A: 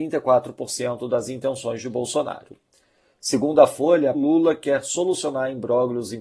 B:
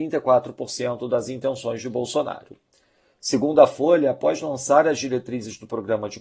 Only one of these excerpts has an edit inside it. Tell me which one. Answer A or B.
A